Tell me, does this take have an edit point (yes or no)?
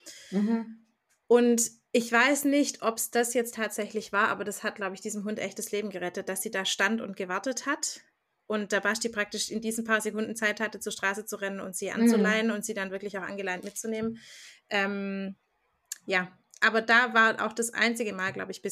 no